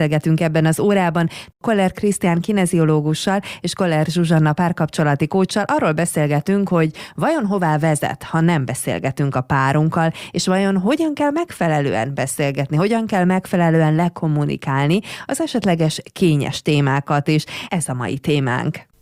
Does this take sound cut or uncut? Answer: cut